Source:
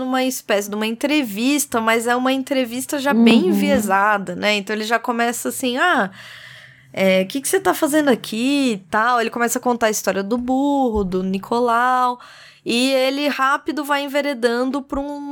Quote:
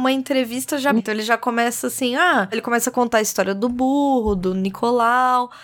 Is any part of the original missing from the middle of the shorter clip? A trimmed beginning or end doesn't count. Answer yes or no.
yes